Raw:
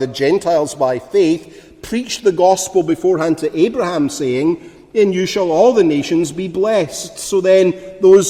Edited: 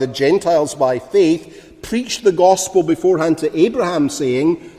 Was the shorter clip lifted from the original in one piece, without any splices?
yes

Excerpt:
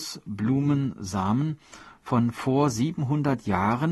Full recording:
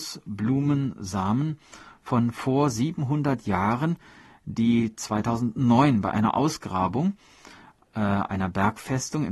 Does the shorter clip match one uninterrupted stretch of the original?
yes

